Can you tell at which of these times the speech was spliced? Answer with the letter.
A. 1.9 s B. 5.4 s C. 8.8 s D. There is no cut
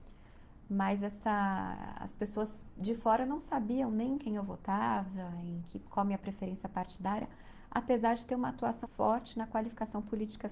C